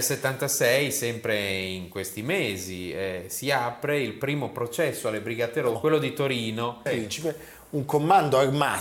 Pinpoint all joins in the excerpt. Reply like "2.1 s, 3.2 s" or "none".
5.8 s, 6.9 s